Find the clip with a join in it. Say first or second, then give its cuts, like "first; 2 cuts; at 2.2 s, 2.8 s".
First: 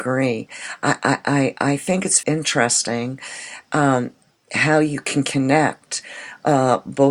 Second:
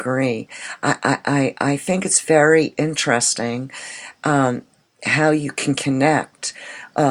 first; 1 cut; at 2.2 s